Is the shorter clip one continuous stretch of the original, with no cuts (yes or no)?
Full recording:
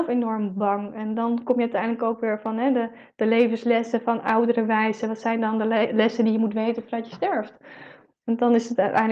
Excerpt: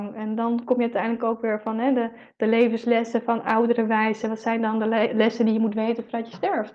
yes